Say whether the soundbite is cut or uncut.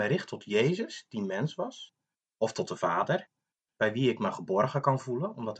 cut